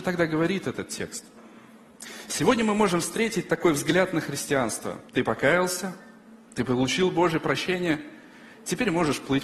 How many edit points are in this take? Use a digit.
1